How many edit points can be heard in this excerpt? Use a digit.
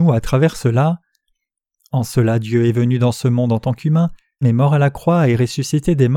1